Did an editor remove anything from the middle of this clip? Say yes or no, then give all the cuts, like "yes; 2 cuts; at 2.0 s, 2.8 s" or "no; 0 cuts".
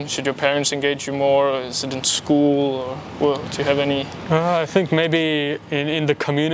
no; 0 cuts